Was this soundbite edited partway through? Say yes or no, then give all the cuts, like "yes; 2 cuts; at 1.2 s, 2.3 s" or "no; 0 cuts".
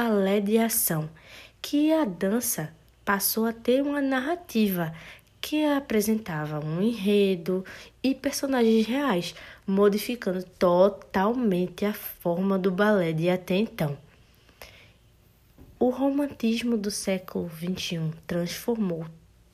no; 0 cuts